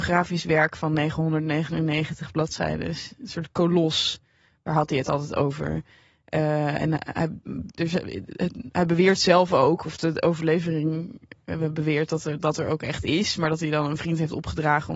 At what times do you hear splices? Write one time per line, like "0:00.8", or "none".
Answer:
none